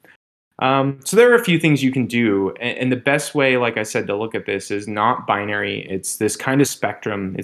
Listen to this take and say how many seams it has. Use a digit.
1